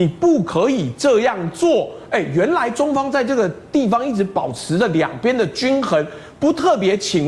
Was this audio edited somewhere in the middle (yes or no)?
no